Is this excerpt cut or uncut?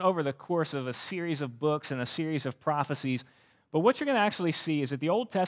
uncut